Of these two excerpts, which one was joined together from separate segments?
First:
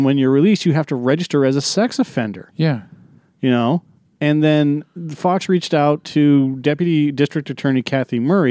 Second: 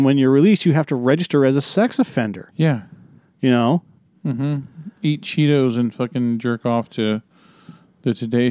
second; 1 cut; at 4.1 s

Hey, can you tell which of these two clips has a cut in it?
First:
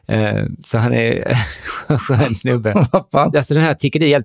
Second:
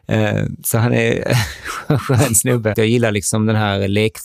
second; 1 cut; at 2.7 s

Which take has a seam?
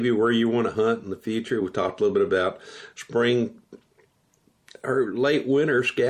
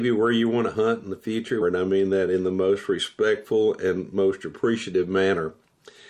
second; 1 cut; at 1.6 s

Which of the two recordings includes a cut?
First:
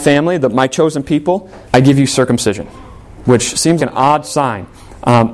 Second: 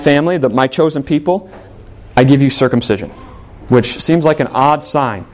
first; 2 cuts; at 1.7 s, 3.8 s

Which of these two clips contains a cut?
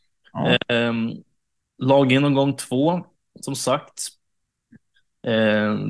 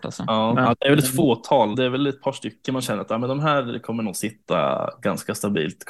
second; 1 cut; at 1.7 s

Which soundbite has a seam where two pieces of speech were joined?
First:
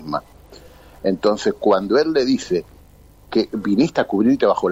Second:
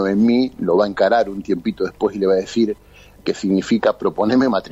second; 1 cut; at 3.2 s

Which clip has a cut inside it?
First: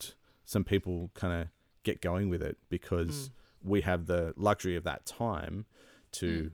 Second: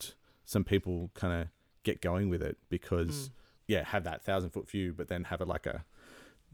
second; 1 cut; at 3.6 s

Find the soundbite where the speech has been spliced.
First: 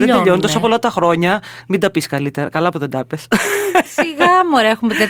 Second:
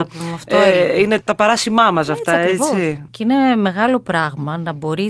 second; 2 cuts; at 1.2 s, 3.1 s

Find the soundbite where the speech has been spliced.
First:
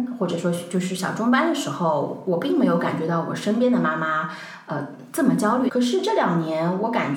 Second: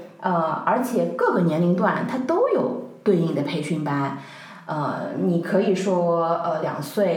first; 1 cut; at 5.7 s

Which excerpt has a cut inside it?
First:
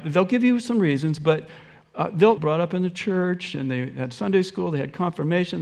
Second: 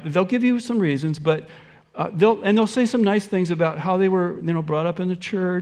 first; 1 cut; at 2.4 s

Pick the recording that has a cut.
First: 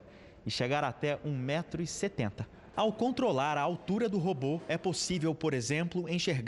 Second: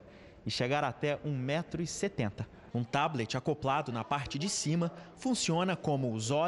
second; 1 cut; at 2.7 s

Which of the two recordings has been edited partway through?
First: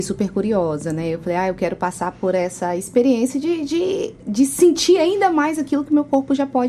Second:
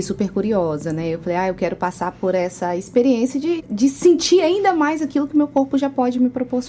second; 1 cut; at 3.6 s

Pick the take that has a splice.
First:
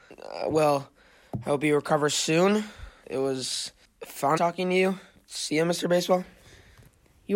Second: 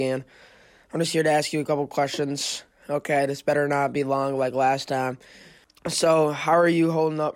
first; 1 cut; at 4.4 s

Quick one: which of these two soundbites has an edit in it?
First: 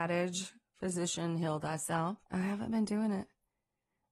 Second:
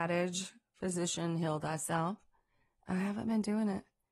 first; 1 cut; at 2.2 s

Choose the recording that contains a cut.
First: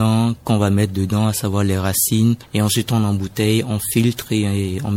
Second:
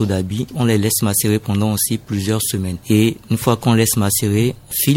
first; 1 cut; at 2.4 s

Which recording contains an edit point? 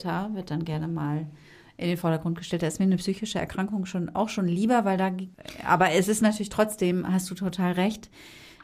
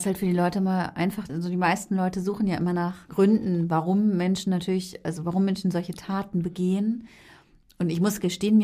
second; 1 cut; at 1.3 s

